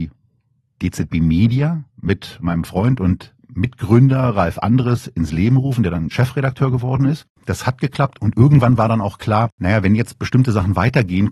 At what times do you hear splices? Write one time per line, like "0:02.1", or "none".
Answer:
0:01.9
0:07.4